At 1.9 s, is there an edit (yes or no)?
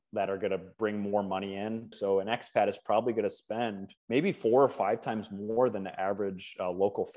yes